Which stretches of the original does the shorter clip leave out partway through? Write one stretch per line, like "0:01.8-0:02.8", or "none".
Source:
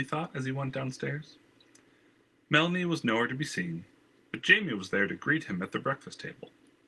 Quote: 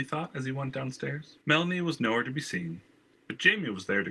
0:01.4-0:02.4